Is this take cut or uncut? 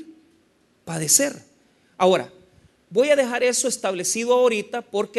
uncut